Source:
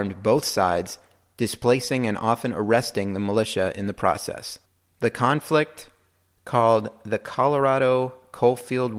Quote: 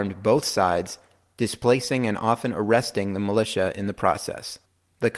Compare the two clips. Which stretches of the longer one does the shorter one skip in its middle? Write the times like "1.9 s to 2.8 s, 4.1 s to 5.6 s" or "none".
none